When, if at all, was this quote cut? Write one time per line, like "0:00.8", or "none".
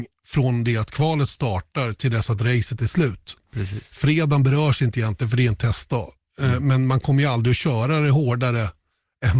none

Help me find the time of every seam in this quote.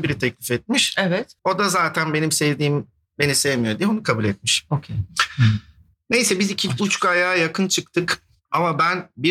0:01.4

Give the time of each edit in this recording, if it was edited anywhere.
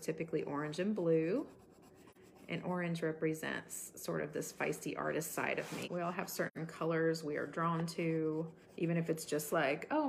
0:05.8
0:08.6

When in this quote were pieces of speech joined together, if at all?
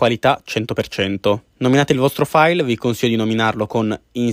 0:01.5

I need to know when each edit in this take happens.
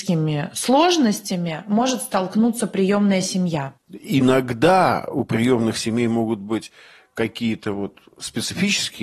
0:03.8

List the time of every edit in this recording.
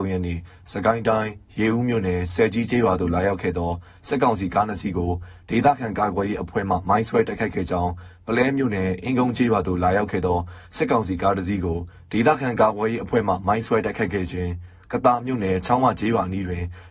none

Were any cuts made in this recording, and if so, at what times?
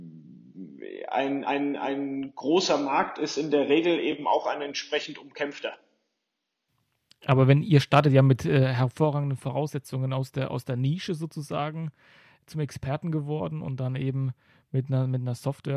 none

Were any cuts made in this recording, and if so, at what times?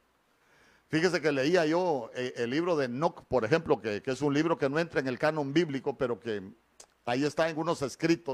none

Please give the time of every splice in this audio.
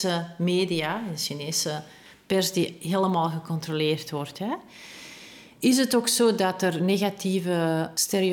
none

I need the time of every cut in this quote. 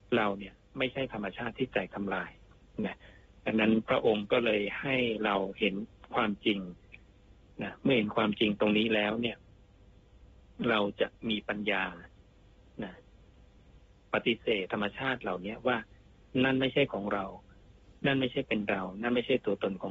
0:14.7

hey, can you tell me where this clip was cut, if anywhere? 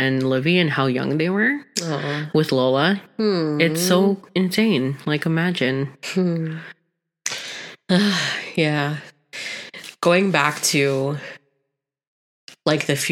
none

